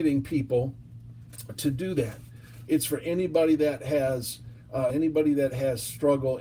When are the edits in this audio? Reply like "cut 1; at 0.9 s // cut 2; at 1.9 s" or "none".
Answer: cut 1; at 2.7 s // cut 2; at 4.9 s